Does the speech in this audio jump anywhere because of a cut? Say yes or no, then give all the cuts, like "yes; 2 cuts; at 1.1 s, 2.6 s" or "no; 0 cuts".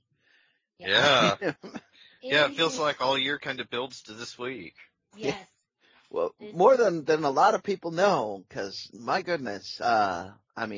no; 0 cuts